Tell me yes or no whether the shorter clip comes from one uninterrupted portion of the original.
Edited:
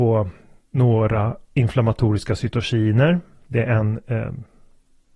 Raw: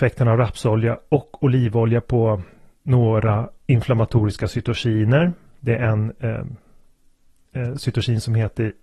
yes